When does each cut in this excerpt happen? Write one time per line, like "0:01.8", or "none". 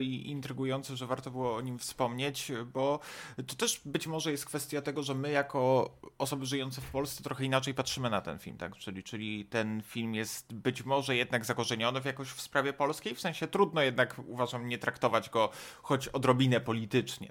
none